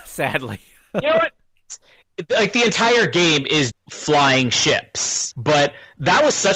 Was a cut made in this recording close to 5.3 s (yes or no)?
yes